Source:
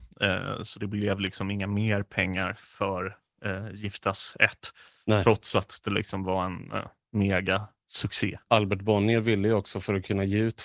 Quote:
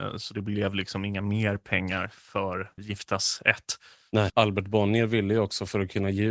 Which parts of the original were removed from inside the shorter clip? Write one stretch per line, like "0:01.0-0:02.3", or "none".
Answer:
0:03.2-0:03.7
0:05.2-0:08.4